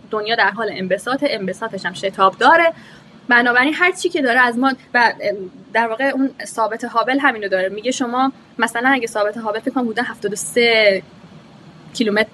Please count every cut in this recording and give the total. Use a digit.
1